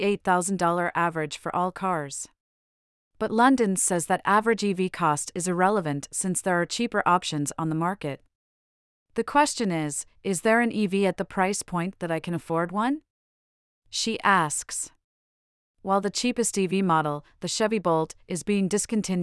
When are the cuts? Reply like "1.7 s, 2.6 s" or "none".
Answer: none